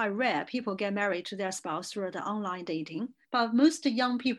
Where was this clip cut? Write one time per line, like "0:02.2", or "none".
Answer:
0:03.2